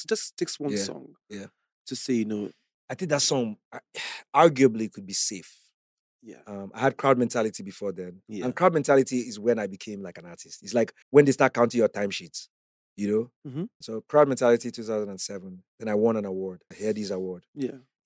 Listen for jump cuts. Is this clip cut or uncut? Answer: cut